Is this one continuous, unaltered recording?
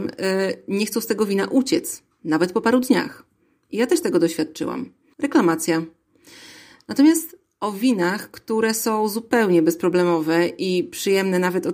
no; 1 cut; at 5.1 s

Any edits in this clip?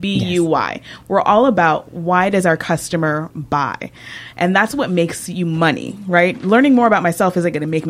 no; 0 cuts

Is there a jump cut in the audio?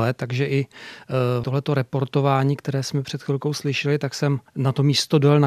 yes; 1 cut; at 4.5 s

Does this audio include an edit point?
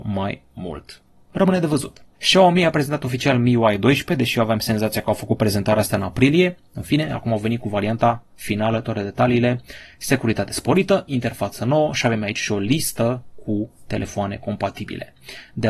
yes; 1 cut; at 2.1 s

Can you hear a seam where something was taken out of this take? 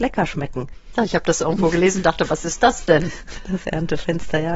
yes; 1 cut; at 0.9 s

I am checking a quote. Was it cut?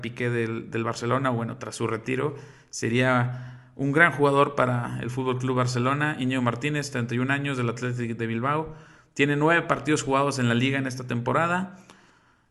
no; 0 cuts

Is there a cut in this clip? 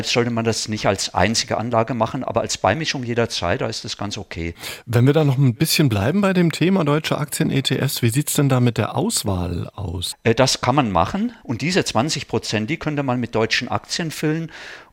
yes; 2 cuts; at 10.1 s, 11.4 s

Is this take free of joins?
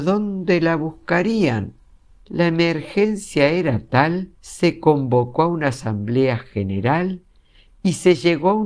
no; 2 cuts; at 2.1 s, 4.4 s

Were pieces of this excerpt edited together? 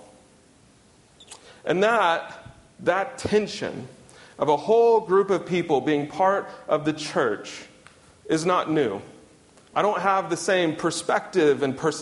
yes; 1 cut; at 9.7 s

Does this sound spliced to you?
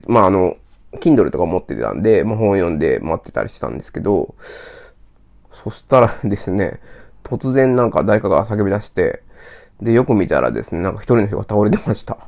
no; 0 cuts

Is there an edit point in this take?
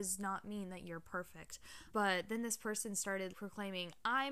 yes; 2 cuts; at 1.9 s, 3.3 s

